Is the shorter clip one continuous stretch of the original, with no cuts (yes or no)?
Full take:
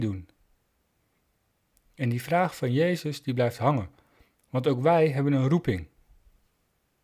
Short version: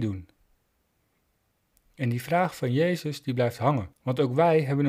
no